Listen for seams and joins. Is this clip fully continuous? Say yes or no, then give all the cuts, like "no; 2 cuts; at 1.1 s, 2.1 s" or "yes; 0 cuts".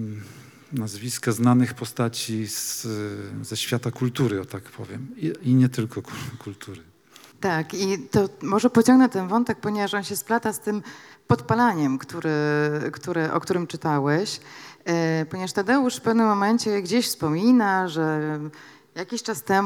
no; 1 cut; at 7.3 s